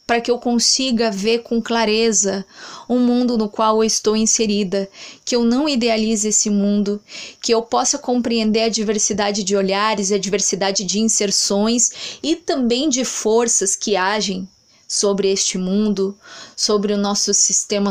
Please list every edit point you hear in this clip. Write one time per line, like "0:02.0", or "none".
none